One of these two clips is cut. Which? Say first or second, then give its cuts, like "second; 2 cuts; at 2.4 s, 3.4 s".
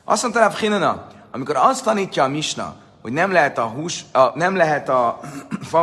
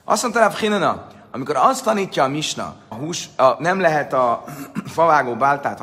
second; 1 cut; at 2.9 s